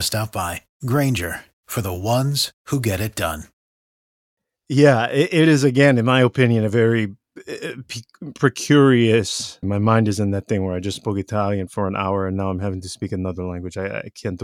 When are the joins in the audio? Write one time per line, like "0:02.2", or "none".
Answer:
0:09.6
0:11.7